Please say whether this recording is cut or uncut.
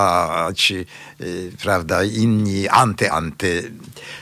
cut